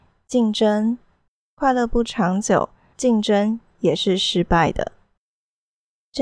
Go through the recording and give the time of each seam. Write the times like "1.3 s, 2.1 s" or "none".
1.4 s, 2.9 s